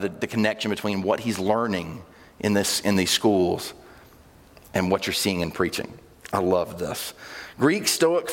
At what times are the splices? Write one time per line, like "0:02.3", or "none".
none